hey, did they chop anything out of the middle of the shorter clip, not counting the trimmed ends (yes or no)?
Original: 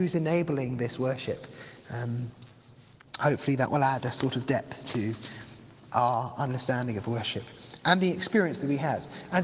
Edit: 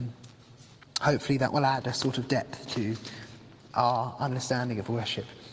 no